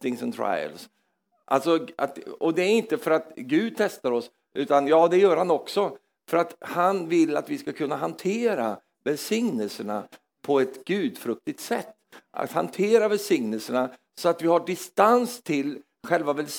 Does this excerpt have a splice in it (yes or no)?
no